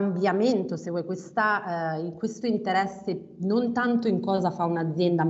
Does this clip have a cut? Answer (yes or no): no